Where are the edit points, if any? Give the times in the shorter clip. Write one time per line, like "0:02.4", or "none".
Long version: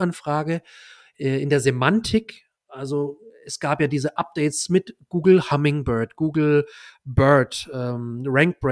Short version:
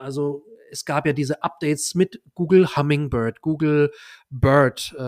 none